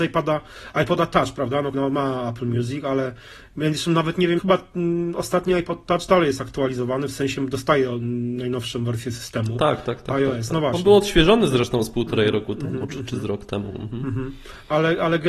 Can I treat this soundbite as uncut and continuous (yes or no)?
no